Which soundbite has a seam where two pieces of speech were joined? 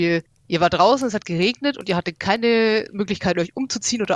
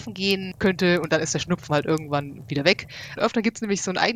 second; 1 cut; at 3.2 s

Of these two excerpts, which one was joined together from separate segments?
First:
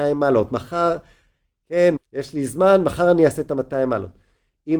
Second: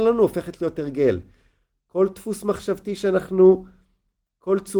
first; 1 cut; at 2.0 s

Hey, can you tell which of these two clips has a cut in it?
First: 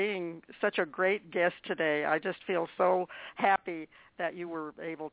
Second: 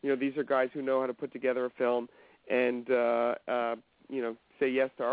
second; 1 cut; at 3.4 s

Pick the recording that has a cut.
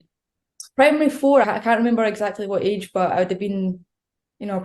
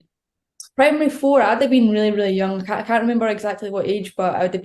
first; 1 cut; at 1.4 s

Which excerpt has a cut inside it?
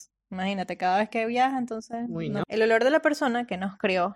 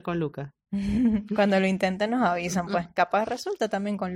first; 1 cut; at 2.4 s

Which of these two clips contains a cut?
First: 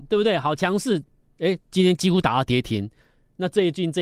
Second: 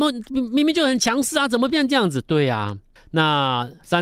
second; 1 cut; at 3.0 s

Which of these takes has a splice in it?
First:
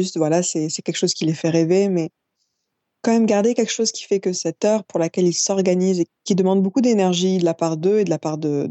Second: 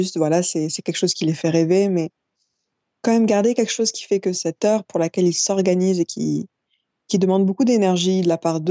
first; 1 cut; at 6.1 s

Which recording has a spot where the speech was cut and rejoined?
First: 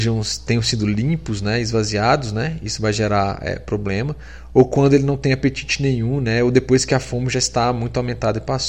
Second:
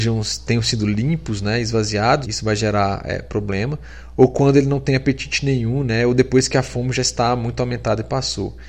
second; 1 cut; at 2.2 s

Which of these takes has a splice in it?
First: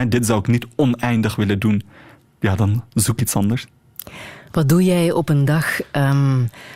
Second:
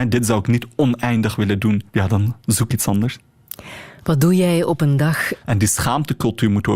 second; 2 cuts; at 1.9 s, 5.4 s

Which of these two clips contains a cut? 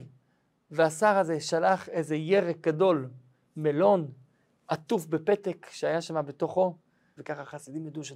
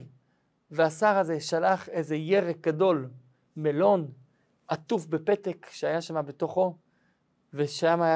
first; 1 cut; at 7.2 s

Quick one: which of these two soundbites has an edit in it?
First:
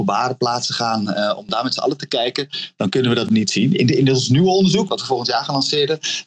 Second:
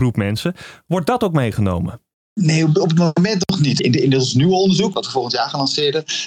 second; 1 cut; at 3.8 s

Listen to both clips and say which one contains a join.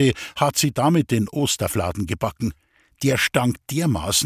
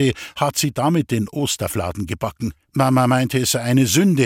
second; 1 cut; at 2.6 s

